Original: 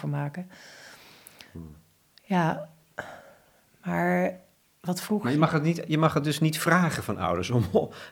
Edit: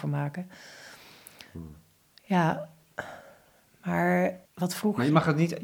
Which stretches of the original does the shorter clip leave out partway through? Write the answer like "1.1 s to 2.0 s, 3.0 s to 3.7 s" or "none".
4.5 s to 4.7 s